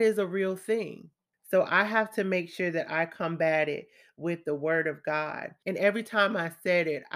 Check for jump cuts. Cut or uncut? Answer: cut